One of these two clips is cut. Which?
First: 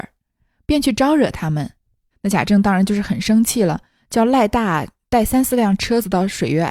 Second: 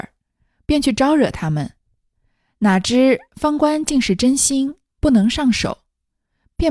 first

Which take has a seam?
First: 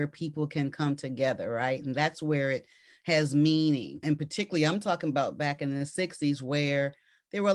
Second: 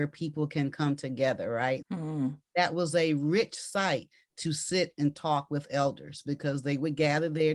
second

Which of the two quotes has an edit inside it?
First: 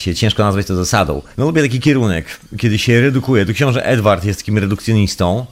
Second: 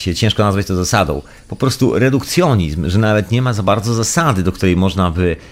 first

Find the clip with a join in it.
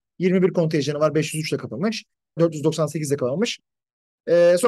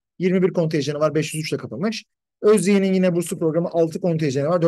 first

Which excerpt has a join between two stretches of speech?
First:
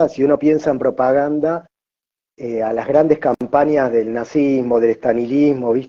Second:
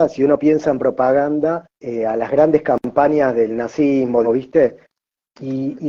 second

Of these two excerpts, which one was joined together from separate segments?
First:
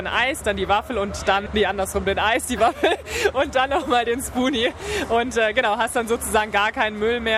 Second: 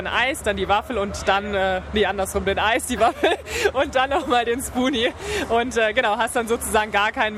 first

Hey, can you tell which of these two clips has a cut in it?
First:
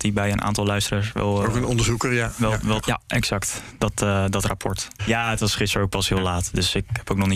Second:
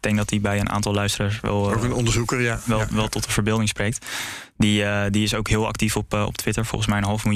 first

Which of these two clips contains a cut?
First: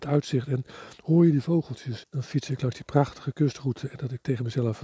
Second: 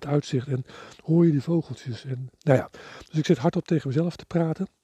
first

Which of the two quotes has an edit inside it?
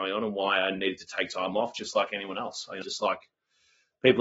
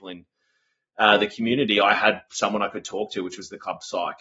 first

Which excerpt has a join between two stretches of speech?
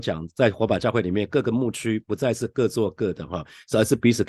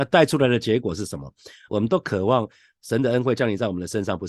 second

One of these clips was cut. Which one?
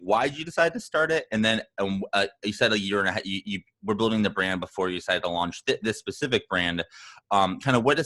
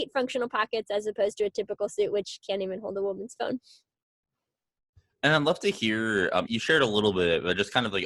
second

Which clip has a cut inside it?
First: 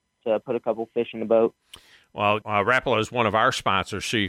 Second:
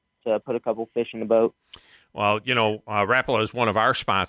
first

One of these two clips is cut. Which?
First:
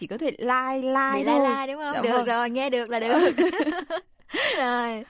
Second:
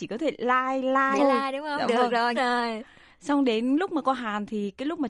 second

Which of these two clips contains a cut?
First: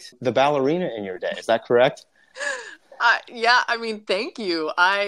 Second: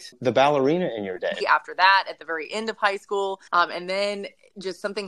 second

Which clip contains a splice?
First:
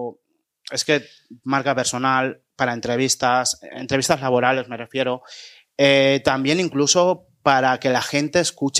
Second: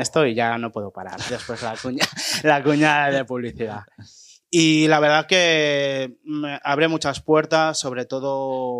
second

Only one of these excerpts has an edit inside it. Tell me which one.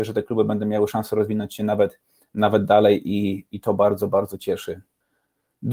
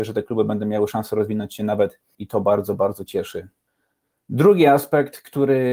second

